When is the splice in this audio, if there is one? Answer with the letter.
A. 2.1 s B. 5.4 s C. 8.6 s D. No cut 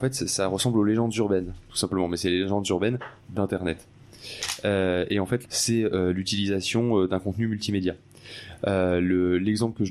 B